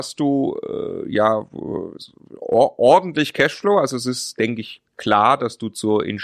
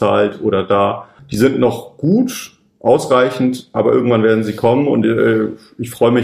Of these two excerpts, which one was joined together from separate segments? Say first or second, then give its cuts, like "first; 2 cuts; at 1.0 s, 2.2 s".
second; 1 cut; at 1.2 s